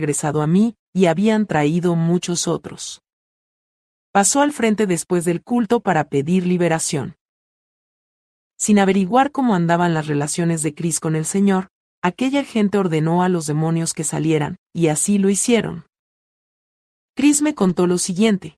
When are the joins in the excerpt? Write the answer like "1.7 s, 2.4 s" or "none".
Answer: 4.1 s